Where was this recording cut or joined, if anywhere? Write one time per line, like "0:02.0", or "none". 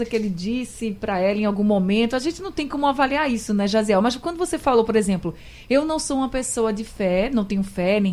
none